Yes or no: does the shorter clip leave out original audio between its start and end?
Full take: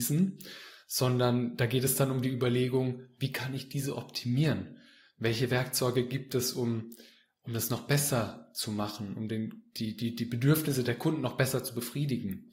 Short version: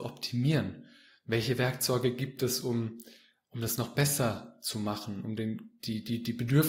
no